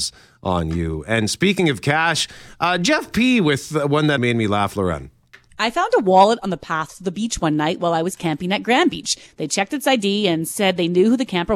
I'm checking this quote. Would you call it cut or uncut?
cut